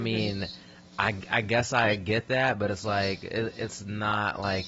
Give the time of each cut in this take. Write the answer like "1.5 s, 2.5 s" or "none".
none